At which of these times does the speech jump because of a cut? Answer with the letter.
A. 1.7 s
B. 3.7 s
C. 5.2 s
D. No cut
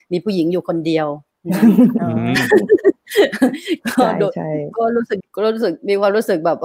C